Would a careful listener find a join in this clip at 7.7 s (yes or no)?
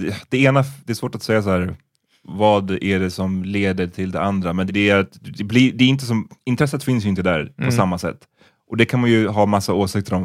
no